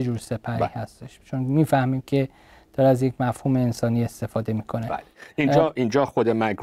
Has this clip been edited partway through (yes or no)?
no